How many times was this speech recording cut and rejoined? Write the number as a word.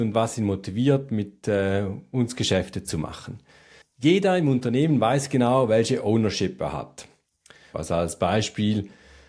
two